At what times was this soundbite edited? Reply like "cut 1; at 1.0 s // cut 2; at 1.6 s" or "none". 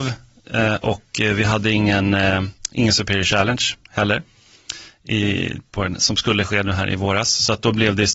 none